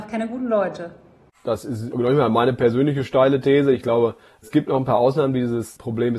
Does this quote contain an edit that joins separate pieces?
no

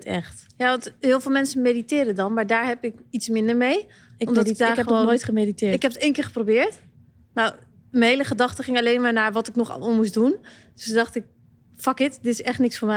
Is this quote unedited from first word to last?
yes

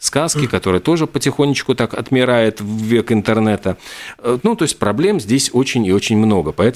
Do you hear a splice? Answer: no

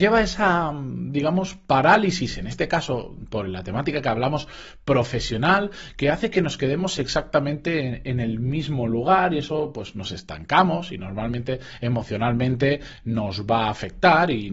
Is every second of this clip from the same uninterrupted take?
yes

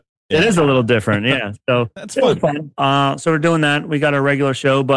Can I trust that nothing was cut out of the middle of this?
no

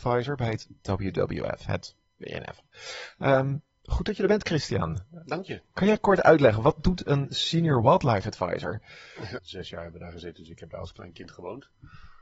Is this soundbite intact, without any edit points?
no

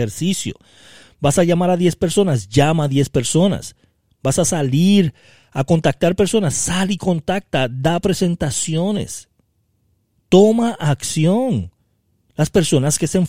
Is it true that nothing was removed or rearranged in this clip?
yes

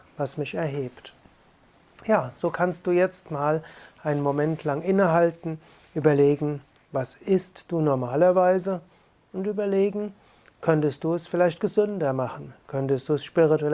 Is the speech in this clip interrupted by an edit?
no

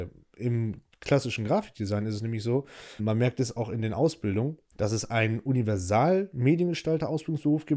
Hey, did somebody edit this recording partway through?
yes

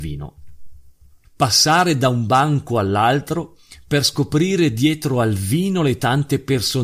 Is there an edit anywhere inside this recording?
yes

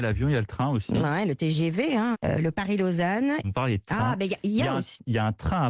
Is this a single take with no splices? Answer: no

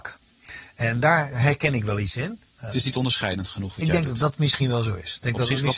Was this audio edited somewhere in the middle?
yes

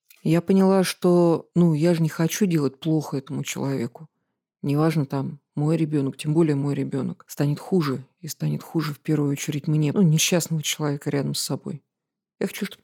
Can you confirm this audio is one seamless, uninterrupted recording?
no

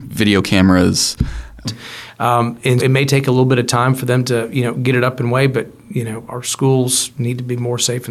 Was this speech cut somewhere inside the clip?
yes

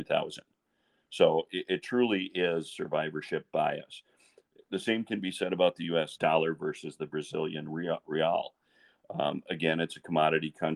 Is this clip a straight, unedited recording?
no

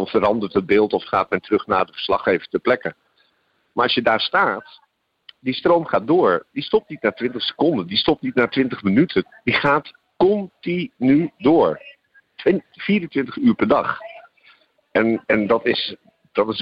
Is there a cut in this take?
no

